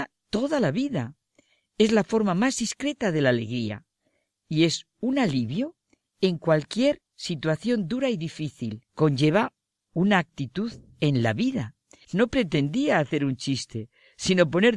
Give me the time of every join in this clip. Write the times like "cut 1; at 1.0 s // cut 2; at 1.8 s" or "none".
cut 1; at 8.9 s // cut 2; at 12.0 s